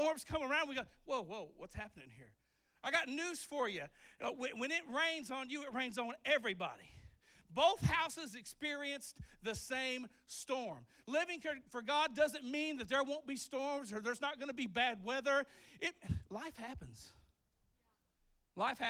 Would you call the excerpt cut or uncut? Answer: uncut